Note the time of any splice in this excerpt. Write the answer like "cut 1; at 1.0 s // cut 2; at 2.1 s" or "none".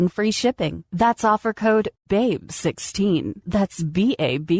none